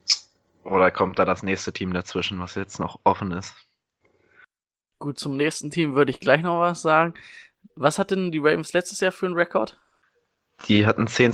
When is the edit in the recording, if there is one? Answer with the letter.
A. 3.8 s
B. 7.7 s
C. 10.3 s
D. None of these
B